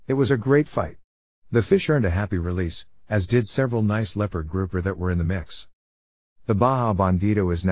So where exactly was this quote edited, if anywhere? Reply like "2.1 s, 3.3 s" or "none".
none

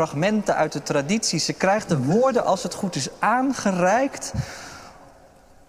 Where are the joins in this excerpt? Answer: none

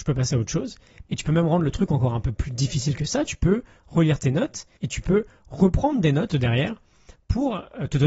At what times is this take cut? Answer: 1.0 s, 6.3 s

